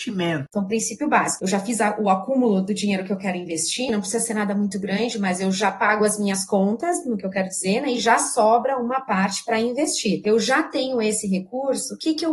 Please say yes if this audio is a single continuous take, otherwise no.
yes